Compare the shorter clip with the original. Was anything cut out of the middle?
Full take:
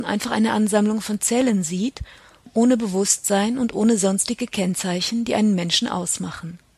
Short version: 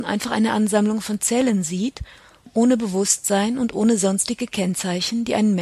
no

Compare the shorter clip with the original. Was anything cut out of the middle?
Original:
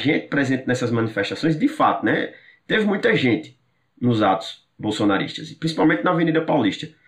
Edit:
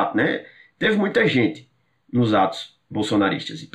no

